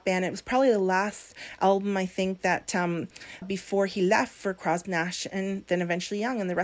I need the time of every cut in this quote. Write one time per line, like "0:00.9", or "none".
0:03.4
0:04.8